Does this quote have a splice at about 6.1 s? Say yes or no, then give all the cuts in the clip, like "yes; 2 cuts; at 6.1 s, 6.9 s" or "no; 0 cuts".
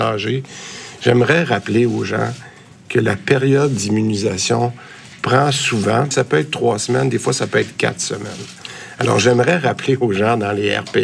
yes; 1 cut; at 6.1 s